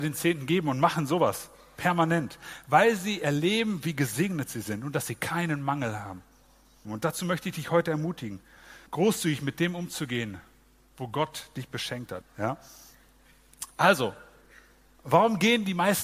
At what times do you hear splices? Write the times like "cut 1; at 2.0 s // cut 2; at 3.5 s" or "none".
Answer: cut 1; at 6.8 s // cut 2; at 8.9 s // cut 3; at 12.2 s